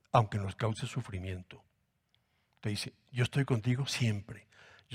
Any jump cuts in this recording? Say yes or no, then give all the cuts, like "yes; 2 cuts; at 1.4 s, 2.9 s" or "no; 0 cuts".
no; 0 cuts